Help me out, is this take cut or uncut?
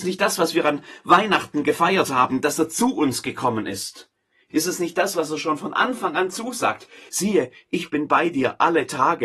cut